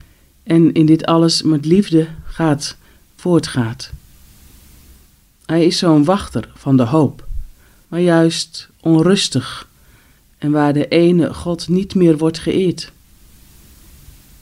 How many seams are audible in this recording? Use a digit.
1